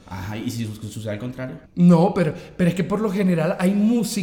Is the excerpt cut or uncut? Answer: cut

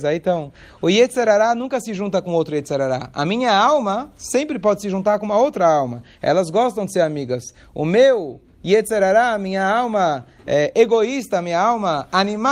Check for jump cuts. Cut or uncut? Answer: uncut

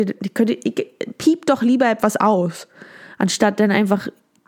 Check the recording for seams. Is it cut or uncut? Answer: uncut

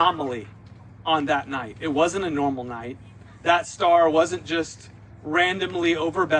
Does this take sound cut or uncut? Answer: uncut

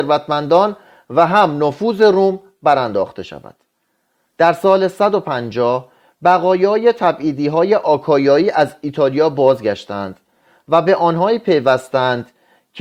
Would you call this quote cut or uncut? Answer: uncut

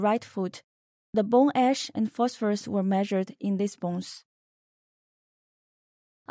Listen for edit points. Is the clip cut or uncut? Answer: uncut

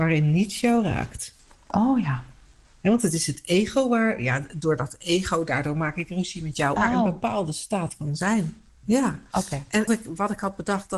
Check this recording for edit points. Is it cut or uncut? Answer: cut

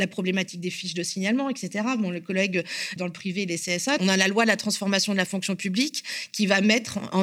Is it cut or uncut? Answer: cut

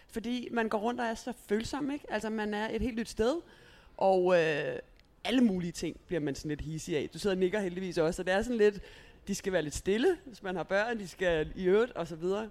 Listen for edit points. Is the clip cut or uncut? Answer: uncut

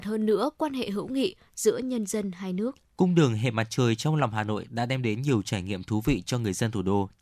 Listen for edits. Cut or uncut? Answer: cut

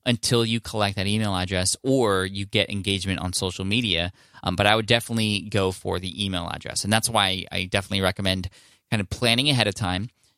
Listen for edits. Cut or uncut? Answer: uncut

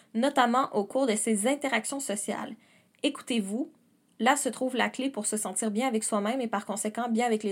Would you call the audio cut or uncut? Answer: uncut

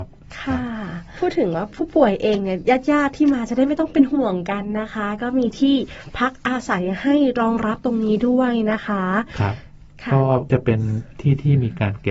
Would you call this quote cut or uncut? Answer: uncut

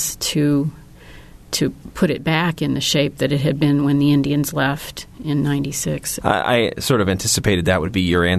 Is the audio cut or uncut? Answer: cut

